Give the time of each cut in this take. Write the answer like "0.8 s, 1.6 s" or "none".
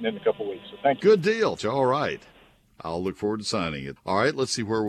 1.6 s, 4.0 s